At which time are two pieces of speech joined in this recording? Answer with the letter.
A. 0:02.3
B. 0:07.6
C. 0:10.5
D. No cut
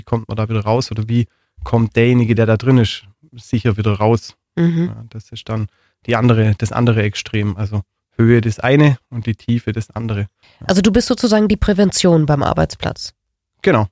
D